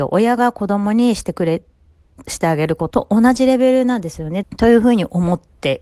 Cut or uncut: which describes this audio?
cut